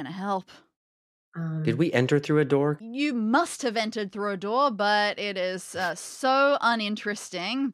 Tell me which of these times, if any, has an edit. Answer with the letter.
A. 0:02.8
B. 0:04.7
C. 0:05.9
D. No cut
A